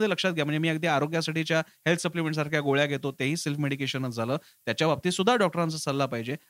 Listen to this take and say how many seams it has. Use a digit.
0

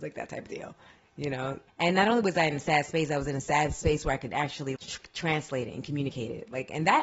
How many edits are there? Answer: 2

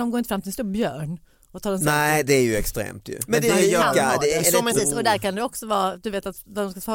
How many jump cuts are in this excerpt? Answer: 2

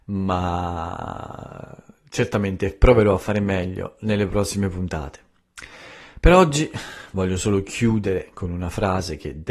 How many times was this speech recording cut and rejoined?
0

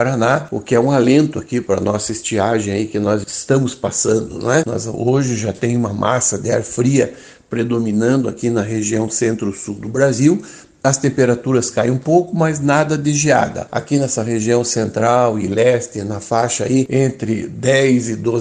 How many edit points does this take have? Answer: 2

